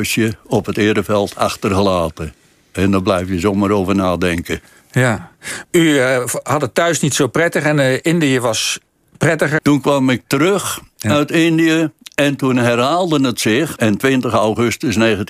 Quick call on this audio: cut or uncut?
cut